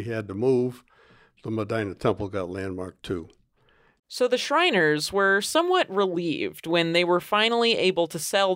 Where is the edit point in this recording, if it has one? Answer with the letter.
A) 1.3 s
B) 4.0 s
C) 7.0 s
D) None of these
B